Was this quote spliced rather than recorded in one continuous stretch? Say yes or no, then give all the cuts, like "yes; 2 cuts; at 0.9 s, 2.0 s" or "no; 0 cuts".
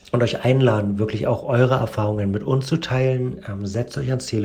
no; 0 cuts